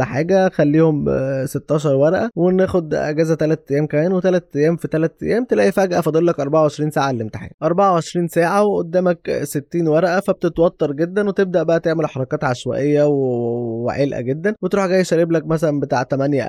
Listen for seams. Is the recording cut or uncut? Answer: uncut